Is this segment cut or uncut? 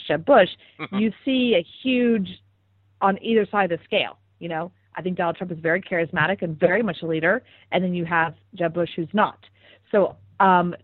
uncut